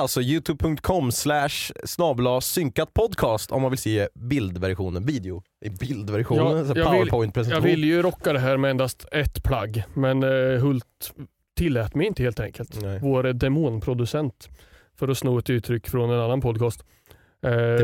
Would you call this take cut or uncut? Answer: uncut